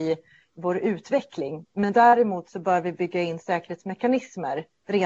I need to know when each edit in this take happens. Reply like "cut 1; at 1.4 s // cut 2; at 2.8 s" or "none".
none